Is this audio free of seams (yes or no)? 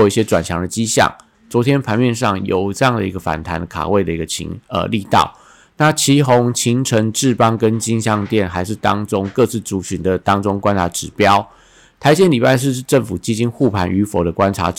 no